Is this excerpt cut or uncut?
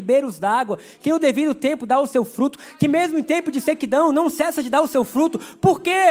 uncut